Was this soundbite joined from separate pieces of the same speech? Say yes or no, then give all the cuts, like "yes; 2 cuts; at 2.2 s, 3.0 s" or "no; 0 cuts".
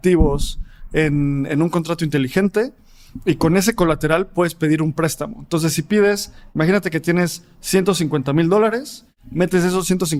no; 0 cuts